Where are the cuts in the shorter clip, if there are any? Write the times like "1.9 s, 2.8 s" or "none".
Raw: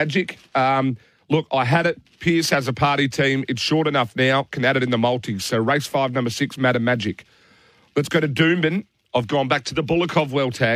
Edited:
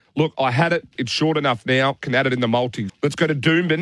1.0 s, 2.9 s